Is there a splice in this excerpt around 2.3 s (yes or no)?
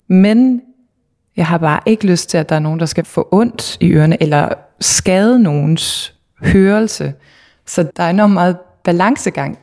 no